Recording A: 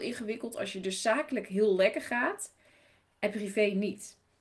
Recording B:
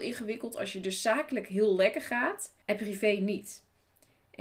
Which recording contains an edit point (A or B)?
B